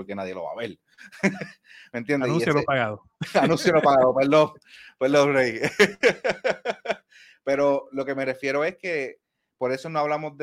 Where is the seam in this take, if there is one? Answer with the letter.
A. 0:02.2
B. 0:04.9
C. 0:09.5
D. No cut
D